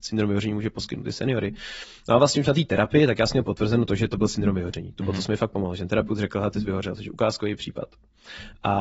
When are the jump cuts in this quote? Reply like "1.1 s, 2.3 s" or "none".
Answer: none